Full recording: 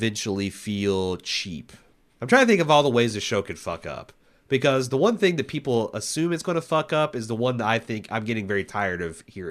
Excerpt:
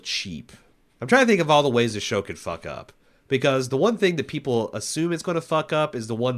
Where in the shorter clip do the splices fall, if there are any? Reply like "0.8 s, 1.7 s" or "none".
none